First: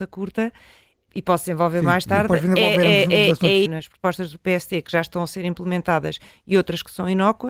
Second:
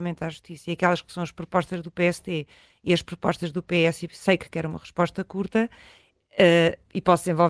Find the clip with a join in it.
first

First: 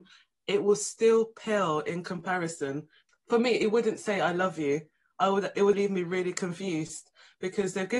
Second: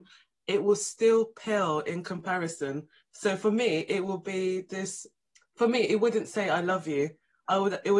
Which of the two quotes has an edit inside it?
first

